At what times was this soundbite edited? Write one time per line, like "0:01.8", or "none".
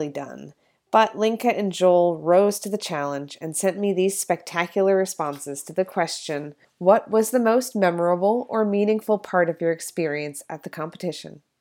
none